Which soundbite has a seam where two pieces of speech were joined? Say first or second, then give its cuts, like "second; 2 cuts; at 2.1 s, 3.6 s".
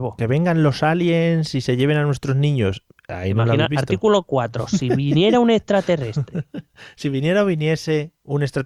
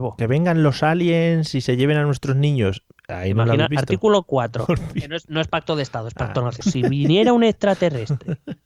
second; 2 cuts; at 4.7 s, 6.6 s